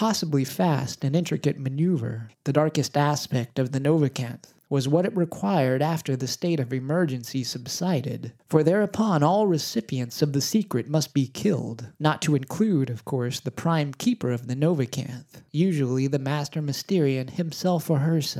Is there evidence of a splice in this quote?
yes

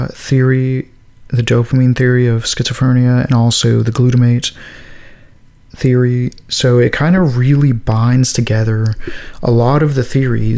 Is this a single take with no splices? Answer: yes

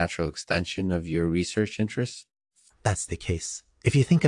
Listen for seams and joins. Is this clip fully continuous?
no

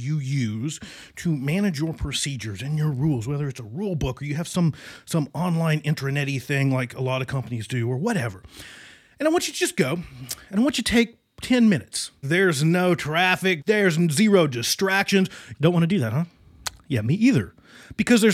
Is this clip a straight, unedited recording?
no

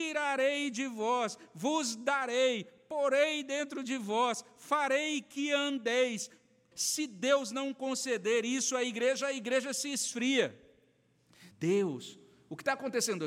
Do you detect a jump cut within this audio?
yes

